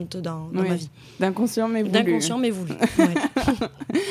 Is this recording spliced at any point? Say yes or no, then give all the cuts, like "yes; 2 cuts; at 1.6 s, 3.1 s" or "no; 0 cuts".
no; 0 cuts